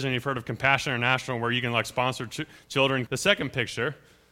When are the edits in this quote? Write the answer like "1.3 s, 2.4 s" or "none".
3.1 s